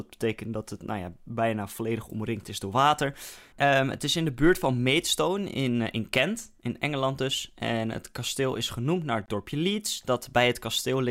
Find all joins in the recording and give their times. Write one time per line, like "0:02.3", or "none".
0:03.5

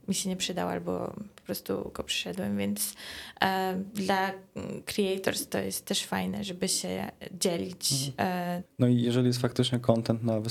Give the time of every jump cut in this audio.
0:08.6

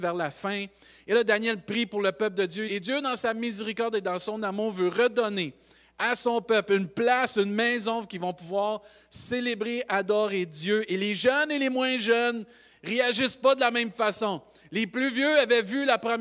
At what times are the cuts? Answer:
0:02.7

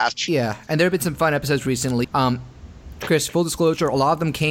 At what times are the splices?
0:02.0

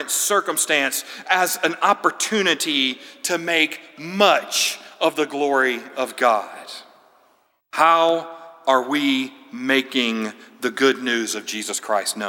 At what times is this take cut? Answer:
0:07.6

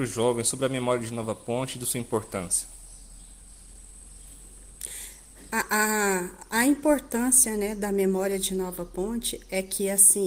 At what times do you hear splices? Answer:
none

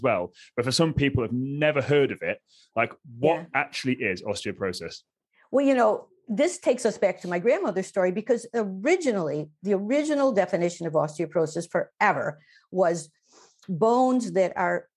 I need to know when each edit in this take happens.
none

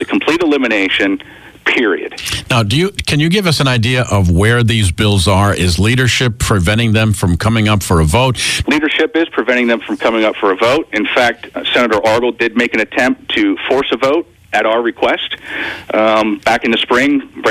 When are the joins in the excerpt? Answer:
0:08.6

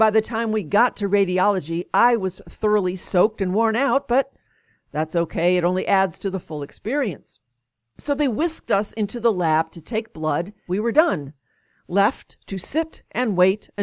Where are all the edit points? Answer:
0:10.7

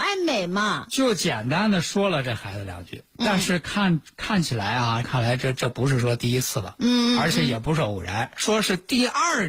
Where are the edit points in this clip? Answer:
0:05.0

